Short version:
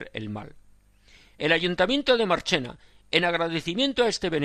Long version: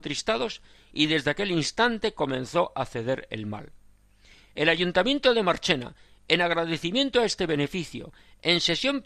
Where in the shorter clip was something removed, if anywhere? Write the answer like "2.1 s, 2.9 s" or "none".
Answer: none

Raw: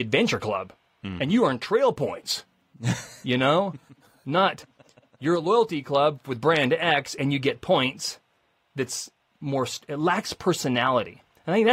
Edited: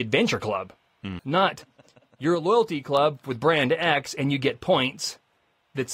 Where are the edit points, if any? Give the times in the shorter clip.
1.2 s

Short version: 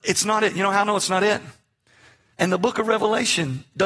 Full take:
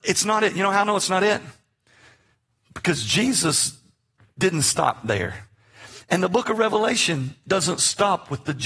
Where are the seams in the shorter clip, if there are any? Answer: 2.3 s

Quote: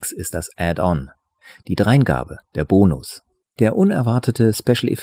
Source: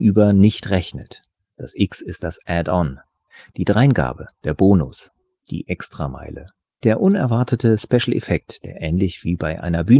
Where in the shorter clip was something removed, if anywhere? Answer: 3.4 s

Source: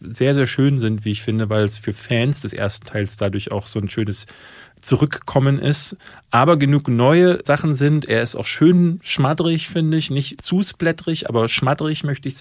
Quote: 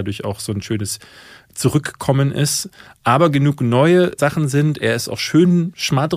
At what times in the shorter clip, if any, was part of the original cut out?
none

